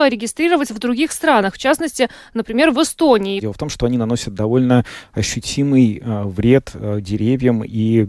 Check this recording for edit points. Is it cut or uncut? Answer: cut